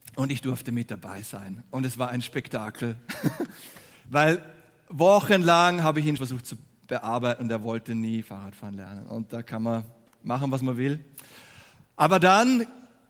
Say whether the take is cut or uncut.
cut